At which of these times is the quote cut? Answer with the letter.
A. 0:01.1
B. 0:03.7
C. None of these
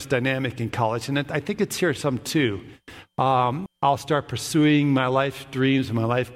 B